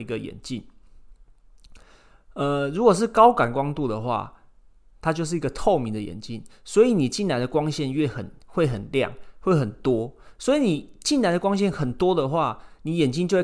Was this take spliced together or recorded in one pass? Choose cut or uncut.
uncut